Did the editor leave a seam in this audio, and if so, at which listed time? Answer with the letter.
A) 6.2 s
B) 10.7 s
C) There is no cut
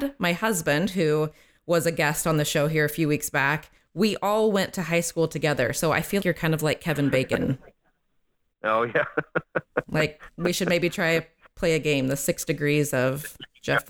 A